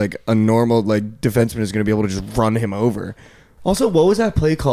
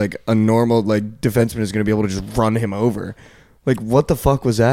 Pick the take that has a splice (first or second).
first